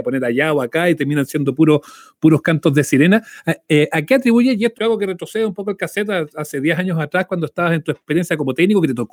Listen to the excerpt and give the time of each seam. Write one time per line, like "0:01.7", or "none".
0:04.7